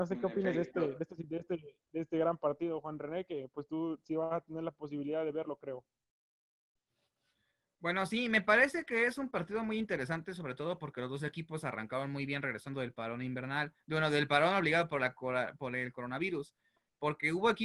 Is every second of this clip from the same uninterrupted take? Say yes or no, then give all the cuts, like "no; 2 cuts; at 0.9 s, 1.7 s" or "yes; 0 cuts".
yes; 0 cuts